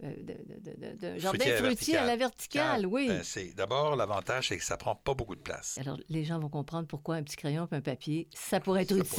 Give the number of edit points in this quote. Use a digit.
1